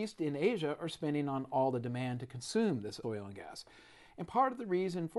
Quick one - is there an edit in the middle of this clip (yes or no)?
no